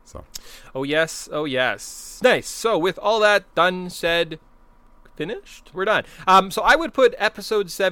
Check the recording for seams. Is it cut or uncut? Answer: cut